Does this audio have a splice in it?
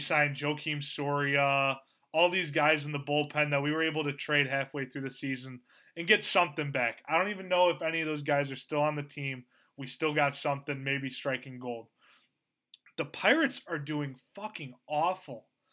no; 0 cuts

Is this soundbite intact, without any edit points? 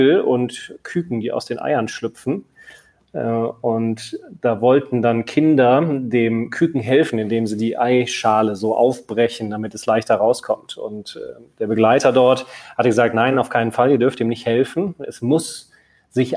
yes; 0 cuts

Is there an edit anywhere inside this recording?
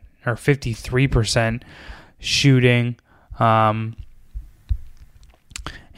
no; 0 cuts

